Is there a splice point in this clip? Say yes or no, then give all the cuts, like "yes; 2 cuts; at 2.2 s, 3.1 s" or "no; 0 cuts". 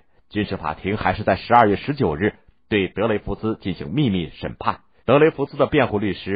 yes; 1 cut; at 5.0 s